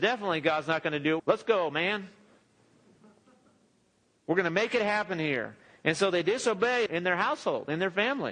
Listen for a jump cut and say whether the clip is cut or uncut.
cut